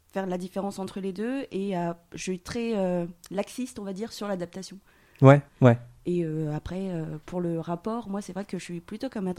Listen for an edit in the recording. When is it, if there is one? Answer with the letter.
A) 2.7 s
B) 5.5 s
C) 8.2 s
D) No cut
B